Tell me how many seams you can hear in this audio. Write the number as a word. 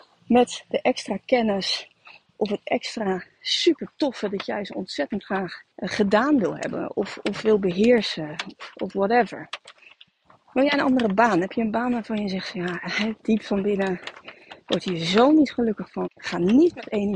two